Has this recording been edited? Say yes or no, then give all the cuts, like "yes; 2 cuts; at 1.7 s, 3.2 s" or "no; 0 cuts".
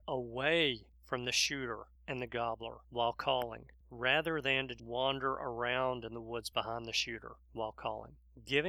yes; 1 cut; at 4.8 s